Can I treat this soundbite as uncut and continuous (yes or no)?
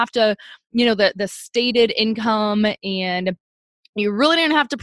yes